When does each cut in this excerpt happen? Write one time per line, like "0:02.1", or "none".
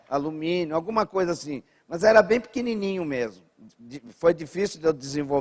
none